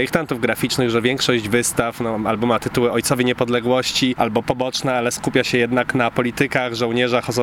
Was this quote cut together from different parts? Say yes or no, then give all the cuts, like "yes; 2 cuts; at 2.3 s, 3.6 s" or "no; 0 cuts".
no; 0 cuts